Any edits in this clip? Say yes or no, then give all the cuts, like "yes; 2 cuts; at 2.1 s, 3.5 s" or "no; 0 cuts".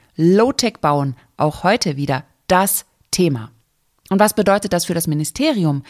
yes; 2 cuts; at 1.4 s, 4.0 s